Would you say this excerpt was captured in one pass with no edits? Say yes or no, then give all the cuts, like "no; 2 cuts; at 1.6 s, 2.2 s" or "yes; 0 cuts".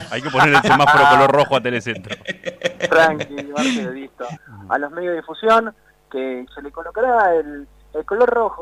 no; 2 cuts; at 4.4 s, 6.5 s